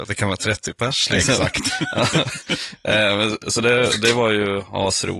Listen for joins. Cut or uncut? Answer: uncut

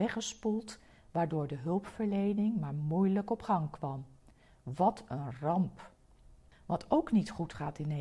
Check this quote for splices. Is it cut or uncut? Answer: uncut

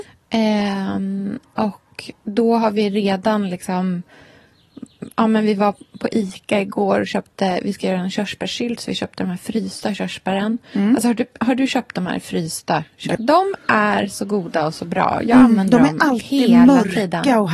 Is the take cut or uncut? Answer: cut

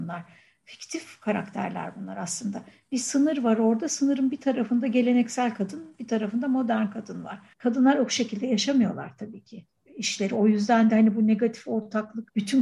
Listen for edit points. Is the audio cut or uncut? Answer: uncut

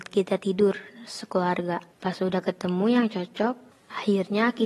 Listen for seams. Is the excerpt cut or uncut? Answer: uncut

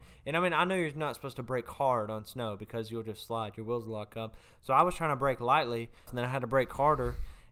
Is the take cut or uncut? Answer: cut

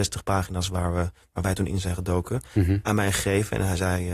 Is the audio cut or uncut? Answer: uncut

